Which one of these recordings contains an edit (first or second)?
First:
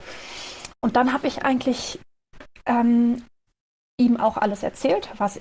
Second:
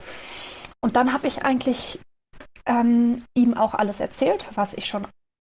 second